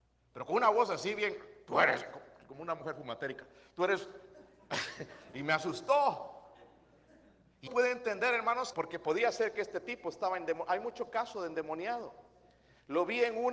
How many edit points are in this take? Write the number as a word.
two